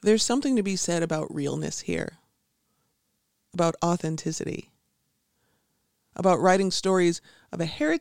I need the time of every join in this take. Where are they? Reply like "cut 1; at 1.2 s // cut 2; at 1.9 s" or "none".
none